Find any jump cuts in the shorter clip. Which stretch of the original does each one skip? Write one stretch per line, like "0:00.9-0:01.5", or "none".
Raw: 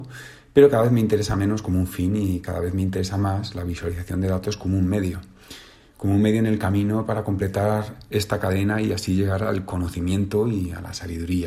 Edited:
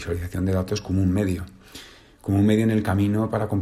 none